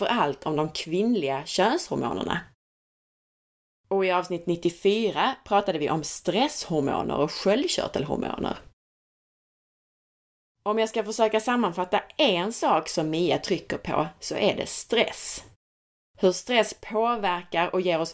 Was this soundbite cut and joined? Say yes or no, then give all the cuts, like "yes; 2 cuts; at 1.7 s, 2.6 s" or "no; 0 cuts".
no; 0 cuts